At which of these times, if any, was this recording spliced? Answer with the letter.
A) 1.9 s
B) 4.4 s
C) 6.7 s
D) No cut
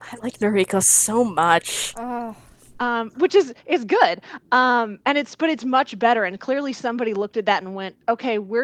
D